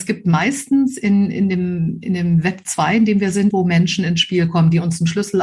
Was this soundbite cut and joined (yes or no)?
yes